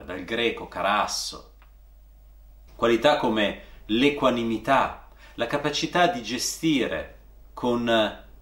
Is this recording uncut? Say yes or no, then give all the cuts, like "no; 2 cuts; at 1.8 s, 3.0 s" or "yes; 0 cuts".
no; 1 cut; at 2.7 s